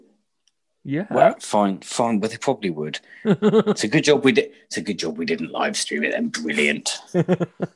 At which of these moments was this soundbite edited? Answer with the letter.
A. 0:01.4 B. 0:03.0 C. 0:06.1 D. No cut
A